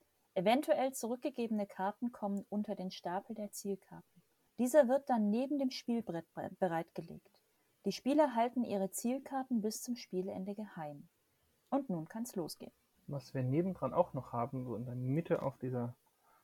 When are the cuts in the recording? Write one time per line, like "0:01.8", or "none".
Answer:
none

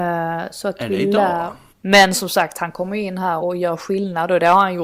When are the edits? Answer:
0:01.7
0:03.4

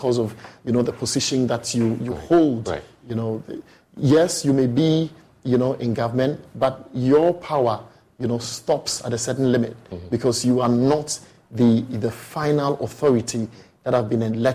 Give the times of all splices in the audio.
none

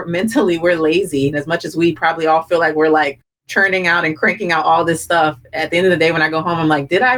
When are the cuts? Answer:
0:01.3

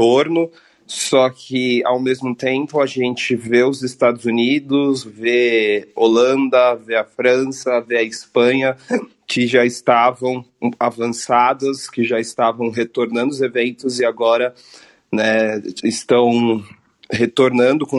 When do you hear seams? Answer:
none

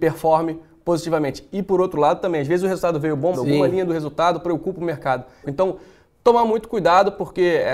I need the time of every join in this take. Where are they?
0:03.3
0:05.4

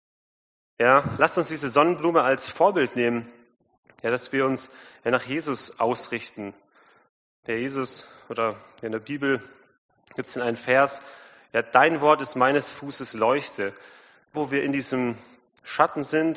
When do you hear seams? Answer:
0:07.4
0:14.3

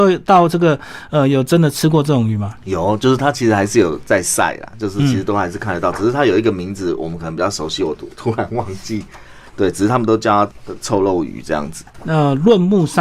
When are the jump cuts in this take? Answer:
none

